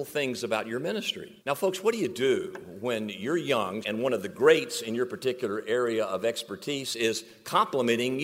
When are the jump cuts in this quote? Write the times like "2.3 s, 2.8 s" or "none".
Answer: 1.4 s, 3.8 s